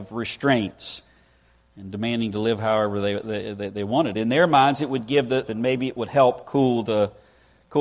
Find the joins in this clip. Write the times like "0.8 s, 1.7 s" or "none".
4.1 s, 5.5 s